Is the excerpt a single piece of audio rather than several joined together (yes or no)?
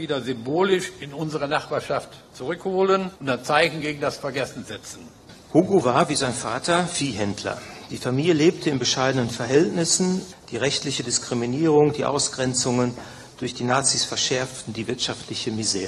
no